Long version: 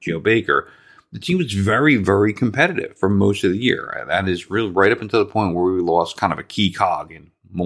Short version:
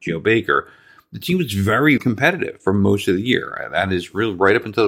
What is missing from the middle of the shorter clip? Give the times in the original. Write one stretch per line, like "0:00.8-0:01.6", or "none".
0:02.0-0:02.3